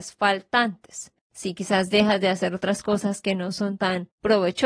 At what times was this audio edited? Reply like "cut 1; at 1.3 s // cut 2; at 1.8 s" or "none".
cut 1; at 1.3 s